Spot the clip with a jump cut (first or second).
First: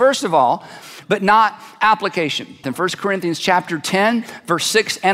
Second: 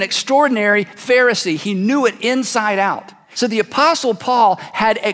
first